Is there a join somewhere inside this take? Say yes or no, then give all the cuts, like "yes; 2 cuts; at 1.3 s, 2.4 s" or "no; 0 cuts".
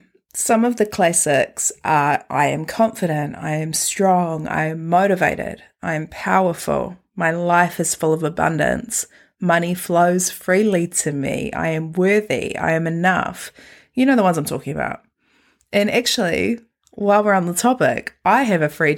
no; 0 cuts